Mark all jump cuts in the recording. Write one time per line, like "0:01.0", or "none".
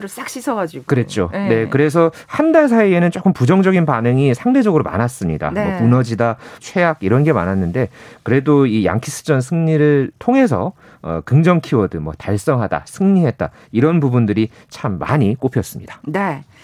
0:06.6